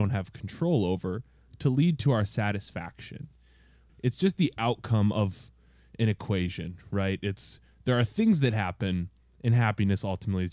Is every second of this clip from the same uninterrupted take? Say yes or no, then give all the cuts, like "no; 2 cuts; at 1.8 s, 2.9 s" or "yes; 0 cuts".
no; 1 cut; at 3.9 s